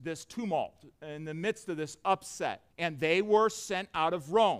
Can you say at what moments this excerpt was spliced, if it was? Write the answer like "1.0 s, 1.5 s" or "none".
2.7 s